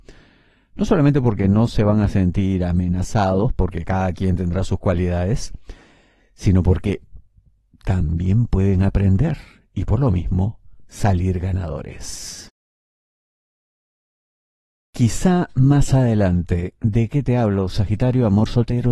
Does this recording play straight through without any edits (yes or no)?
yes